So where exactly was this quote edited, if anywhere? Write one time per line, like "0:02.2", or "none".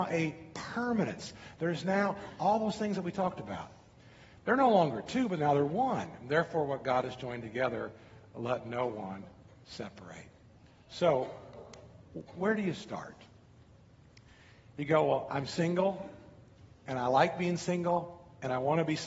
none